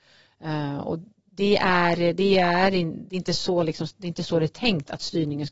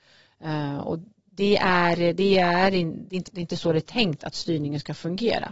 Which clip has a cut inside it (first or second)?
second